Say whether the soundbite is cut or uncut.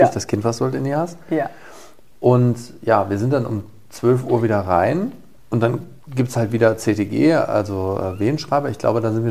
uncut